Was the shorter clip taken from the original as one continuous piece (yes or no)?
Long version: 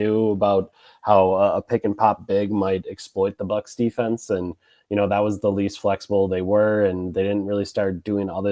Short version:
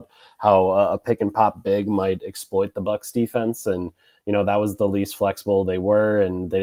yes